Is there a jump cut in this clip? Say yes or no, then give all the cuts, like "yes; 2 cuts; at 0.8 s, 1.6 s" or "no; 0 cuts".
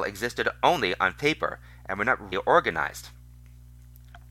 yes; 1 cut; at 2.3 s